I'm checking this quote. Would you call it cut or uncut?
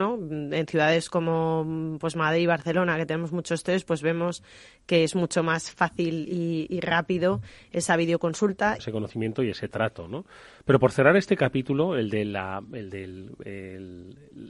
cut